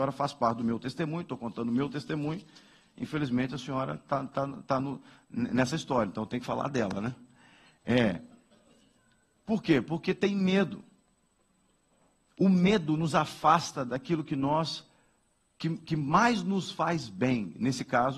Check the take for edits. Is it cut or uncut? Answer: cut